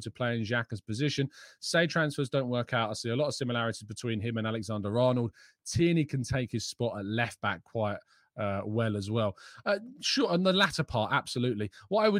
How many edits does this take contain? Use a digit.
0